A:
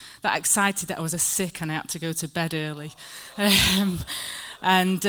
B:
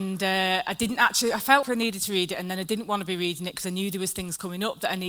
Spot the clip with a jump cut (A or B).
B